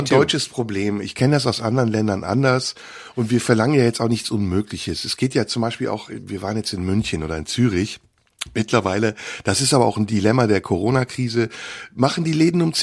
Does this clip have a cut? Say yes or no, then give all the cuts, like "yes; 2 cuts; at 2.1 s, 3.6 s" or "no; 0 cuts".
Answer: no; 0 cuts